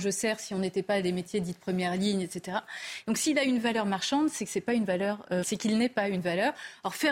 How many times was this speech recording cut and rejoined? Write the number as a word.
two